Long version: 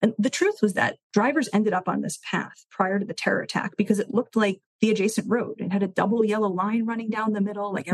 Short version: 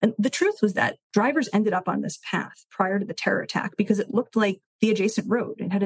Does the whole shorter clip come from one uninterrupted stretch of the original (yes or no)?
yes